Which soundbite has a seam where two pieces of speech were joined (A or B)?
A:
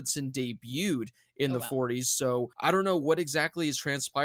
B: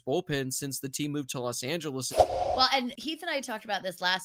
B